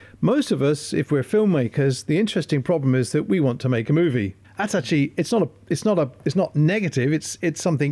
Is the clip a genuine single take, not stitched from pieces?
no; 1 cut; at 4.4 s

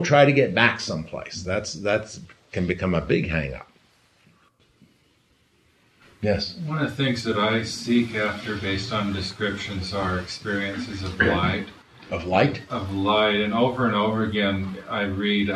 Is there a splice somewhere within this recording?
no; 0 cuts

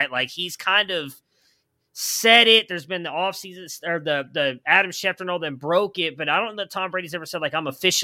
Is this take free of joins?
yes; 0 cuts

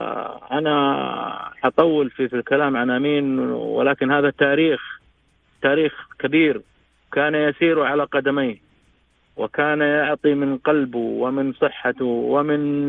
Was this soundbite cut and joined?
yes; 1 cut; at 2.3 s

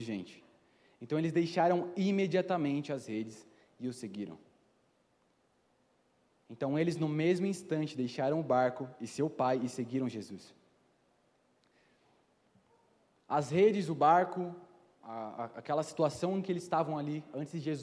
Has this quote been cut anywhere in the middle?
no; 0 cuts

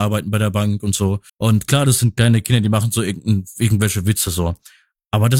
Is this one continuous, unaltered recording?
no; 1 cut; at 1.3 s

